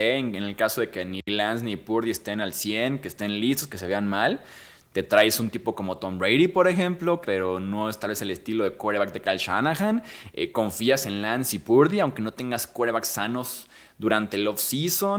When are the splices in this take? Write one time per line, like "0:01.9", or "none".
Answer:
0:07.2